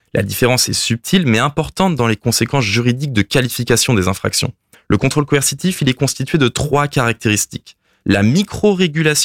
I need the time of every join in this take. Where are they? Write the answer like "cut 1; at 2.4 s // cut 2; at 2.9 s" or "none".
cut 1; at 4.7 s // cut 2; at 8.0 s